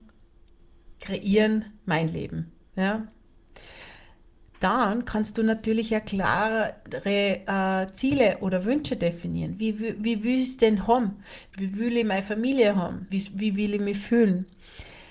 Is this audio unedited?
no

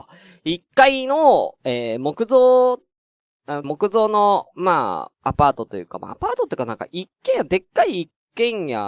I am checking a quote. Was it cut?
yes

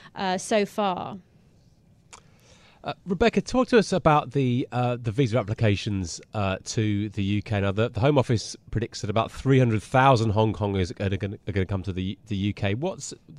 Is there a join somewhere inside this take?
no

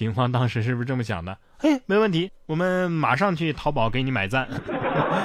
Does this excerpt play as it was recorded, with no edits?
yes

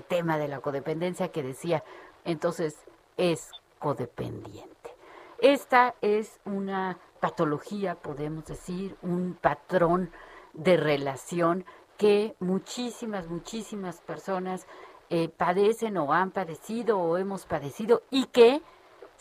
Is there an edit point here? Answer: yes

